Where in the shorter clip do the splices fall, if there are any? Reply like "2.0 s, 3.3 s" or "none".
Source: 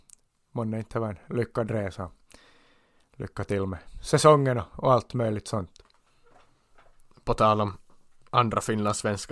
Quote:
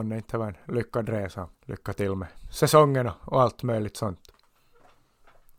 1.5 s

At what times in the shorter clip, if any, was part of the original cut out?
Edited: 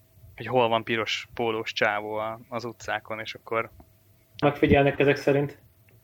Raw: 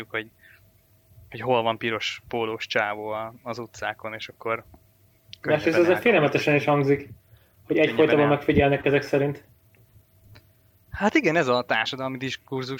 4.4 s

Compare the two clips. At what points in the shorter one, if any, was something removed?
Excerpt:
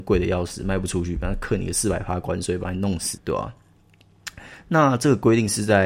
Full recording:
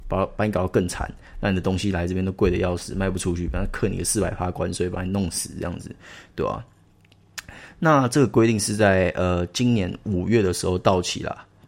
3.2 s

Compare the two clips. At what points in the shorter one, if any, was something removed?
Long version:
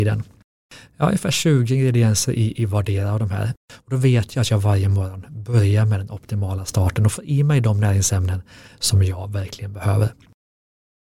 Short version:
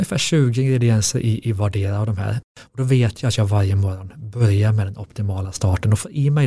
none

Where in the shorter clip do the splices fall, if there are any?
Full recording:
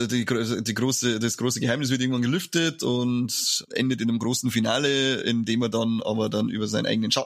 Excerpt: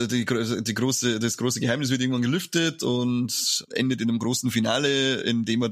none

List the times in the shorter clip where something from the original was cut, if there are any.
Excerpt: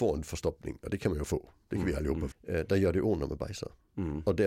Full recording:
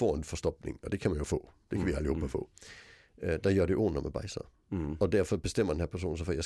2.3 s

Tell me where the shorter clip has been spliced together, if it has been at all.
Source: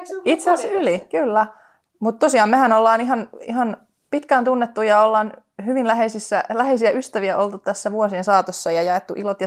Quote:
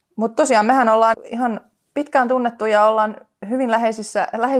1.1 s

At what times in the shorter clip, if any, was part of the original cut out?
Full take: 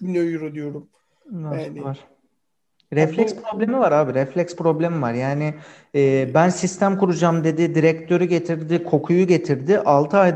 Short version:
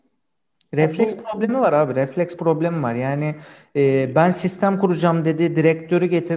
none

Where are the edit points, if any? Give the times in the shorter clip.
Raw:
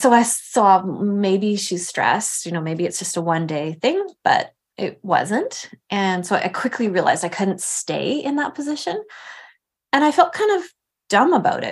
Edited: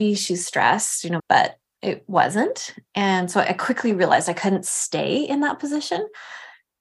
1.2 s

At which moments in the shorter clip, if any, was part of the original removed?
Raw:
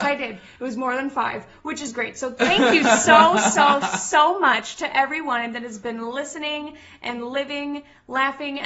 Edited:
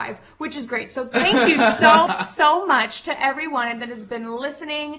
2.1 s

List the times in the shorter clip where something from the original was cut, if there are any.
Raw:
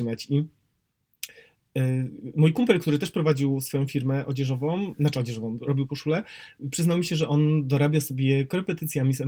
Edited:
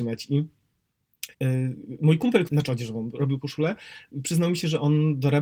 1.3 s, 2.5 s

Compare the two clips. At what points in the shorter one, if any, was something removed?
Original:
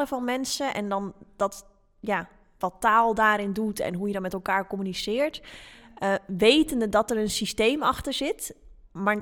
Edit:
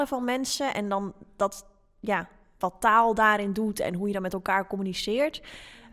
none

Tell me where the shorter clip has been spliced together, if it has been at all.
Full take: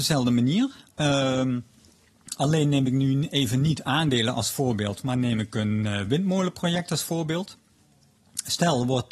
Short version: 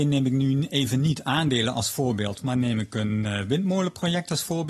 none

